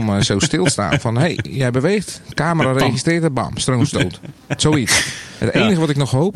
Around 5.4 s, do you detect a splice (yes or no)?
yes